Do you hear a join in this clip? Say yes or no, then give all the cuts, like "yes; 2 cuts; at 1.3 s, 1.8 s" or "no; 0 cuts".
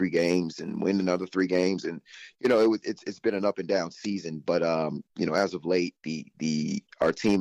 no; 0 cuts